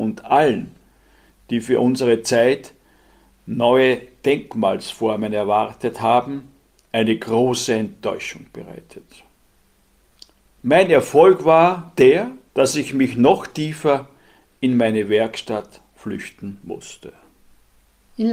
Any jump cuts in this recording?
no; 0 cuts

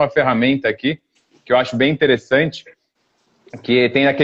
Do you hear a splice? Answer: no; 0 cuts

